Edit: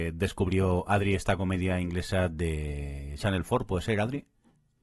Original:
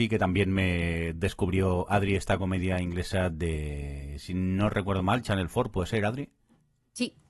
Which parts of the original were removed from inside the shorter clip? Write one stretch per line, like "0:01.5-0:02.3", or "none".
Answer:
0:04.2-0:05.2